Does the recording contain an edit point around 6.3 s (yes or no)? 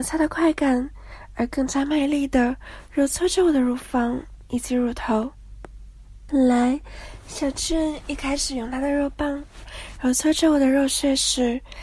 yes